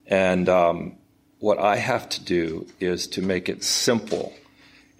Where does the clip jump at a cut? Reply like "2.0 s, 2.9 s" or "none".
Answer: 3.6 s